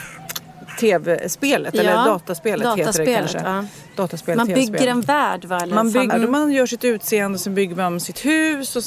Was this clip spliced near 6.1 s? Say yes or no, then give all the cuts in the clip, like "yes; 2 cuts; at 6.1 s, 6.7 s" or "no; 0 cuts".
yes; 1 cut; at 6.1 s